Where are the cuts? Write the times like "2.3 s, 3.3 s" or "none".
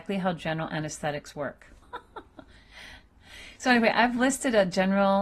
1.8 s